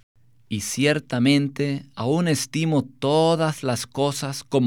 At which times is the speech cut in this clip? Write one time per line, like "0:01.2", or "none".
none